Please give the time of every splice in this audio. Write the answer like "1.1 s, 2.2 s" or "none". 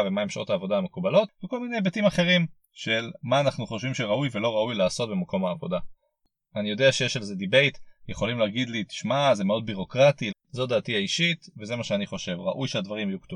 10.3 s